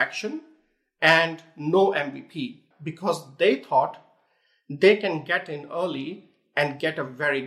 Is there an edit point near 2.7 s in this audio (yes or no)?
yes